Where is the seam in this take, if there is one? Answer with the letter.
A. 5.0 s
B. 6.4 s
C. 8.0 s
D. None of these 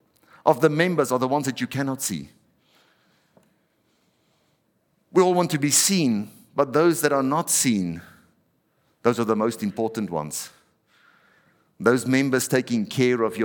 D